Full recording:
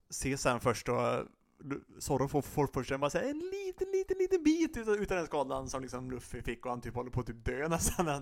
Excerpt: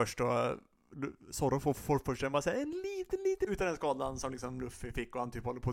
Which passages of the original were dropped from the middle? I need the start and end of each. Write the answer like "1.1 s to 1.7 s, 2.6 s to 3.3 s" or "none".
4.1 s to 5.0 s

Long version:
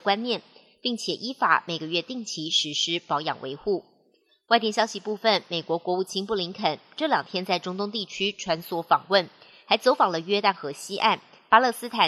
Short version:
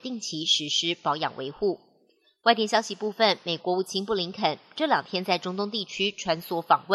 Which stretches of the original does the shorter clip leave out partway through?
5.6 s to 5.8 s

